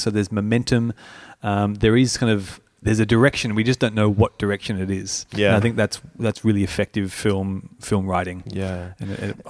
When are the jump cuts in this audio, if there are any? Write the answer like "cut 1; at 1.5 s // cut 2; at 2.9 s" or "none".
none